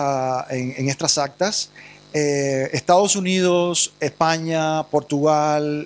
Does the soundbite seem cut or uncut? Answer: uncut